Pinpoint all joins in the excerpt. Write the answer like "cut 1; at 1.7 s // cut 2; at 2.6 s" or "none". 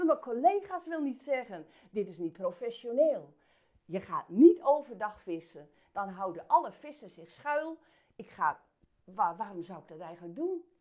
none

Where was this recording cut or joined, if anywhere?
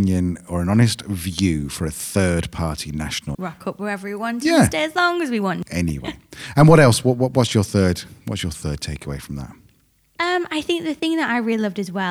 cut 1; at 3.3 s

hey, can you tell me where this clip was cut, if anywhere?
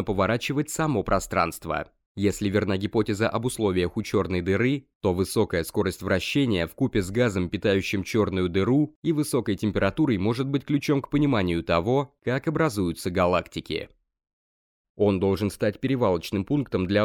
cut 1; at 14.8 s

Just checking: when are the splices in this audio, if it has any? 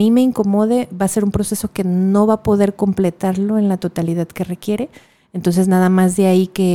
none

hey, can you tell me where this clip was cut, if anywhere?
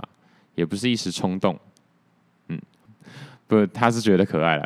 cut 1; at 2.9 s

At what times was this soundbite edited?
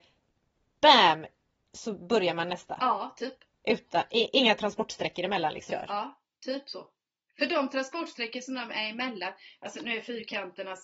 cut 1; at 5.7 s // cut 2; at 7.3 s

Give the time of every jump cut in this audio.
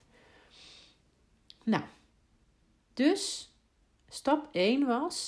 none

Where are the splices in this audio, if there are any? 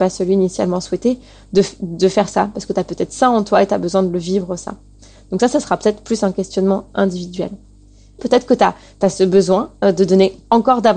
cut 1; at 8.2 s

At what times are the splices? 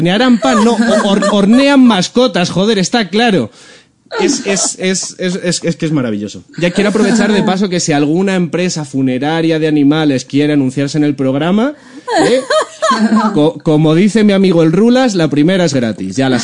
none

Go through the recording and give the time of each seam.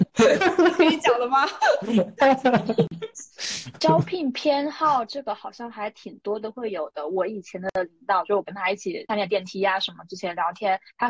none

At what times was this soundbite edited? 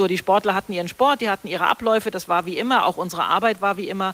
none

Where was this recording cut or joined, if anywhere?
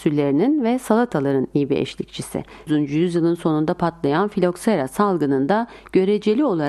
cut 1; at 2.7 s

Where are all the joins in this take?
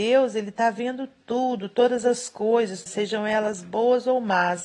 cut 1; at 2.9 s

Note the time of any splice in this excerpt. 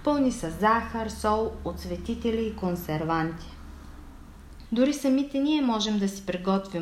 cut 1; at 4.6 s

